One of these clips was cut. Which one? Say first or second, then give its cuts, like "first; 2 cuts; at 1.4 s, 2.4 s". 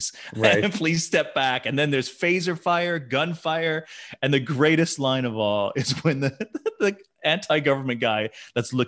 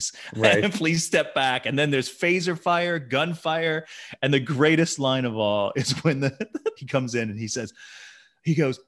second; 1 cut; at 6.8 s